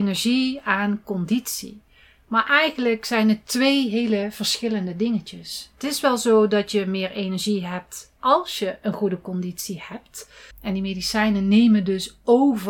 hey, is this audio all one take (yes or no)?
no